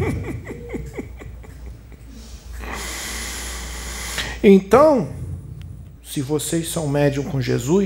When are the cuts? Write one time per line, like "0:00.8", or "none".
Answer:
0:06.0